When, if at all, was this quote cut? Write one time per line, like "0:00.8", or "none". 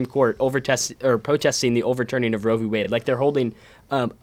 none